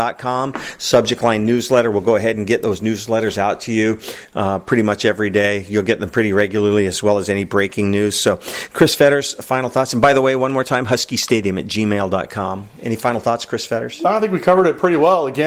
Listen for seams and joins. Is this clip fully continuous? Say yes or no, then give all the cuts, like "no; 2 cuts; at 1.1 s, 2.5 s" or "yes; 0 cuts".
yes; 0 cuts